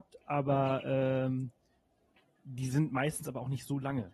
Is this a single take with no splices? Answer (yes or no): yes